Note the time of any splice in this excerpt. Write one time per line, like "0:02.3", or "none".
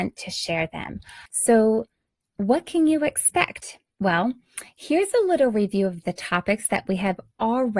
0:01.3